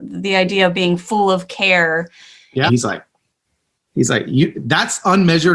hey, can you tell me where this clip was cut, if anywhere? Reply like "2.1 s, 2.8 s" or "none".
2.7 s